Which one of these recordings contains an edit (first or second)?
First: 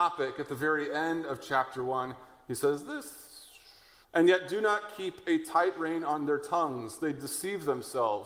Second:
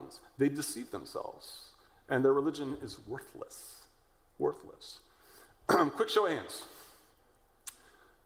first